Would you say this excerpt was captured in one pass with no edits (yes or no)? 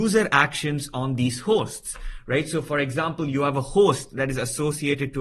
yes